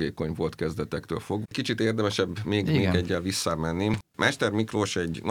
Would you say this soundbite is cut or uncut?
cut